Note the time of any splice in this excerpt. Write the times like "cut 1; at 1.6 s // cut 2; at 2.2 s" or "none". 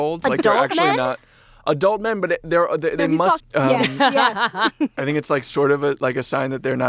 cut 1; at 3.4 s